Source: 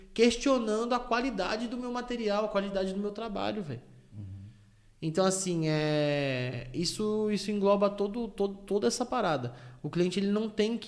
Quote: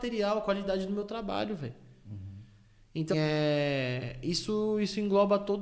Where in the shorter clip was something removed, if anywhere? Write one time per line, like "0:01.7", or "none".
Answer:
0:03.1